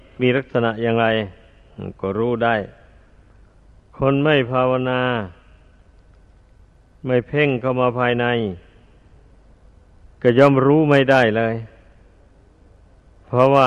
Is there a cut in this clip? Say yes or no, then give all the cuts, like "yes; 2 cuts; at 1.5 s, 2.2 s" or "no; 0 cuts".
no; 0 cuts